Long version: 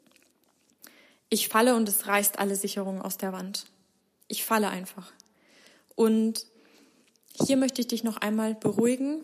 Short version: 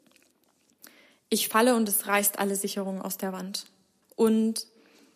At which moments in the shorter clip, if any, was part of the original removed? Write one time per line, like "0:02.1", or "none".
0:04.0